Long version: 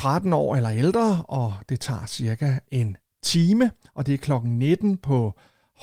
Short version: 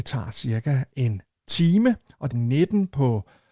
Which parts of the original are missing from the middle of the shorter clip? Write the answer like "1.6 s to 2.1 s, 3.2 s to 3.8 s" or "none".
4.1 s to 4.4 s